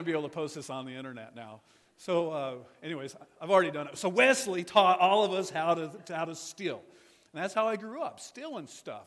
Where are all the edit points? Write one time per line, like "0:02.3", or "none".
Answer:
none